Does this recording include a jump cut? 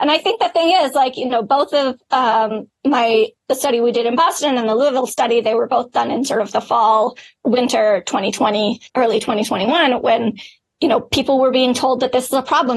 yes; 1 cut; at 8.9 s

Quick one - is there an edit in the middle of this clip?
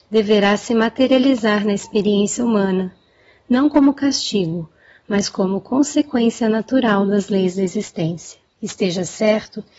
yes; 1 cut; at 8.5 s

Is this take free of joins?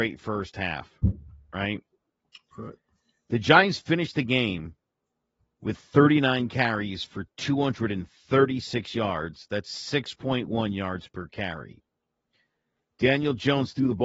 yes; 0 cuts

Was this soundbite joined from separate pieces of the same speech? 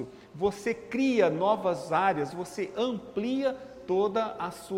yes; 1 cut; at 2.3 s

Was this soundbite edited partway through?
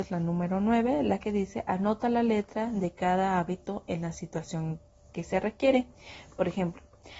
no; 0 cuts

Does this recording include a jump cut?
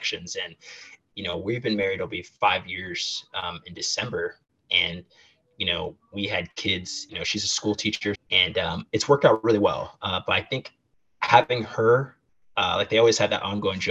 yes; 2 cuts; at 7.1 s, 8.1 s

